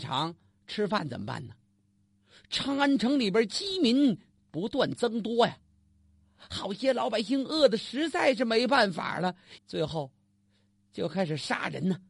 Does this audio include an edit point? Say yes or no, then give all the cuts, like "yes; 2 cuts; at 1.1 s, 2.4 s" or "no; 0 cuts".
yes; 1 cut; at 9.6 s